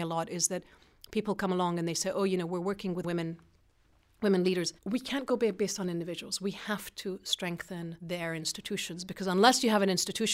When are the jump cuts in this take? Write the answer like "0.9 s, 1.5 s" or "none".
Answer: 3.0 s, 4.8 s, 8.0 s